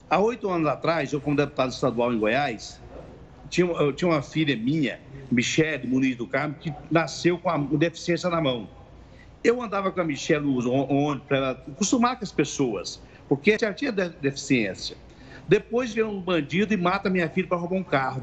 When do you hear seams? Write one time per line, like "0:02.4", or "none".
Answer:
0:13.6